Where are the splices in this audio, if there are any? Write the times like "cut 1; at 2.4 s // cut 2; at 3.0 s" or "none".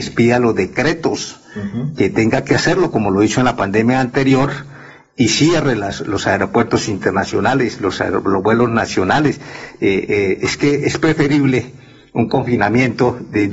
none